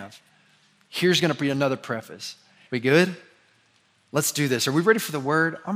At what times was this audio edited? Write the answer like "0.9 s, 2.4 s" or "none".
2.7 s